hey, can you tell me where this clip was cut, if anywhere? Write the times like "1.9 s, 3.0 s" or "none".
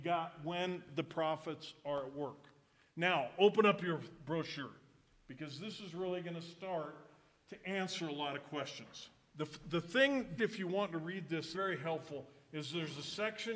9.3 s, 10.4 s, 11.5 s